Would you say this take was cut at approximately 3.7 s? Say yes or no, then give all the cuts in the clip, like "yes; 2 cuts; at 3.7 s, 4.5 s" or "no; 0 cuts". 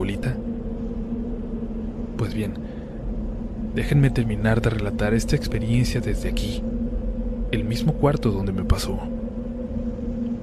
no; 0 cuts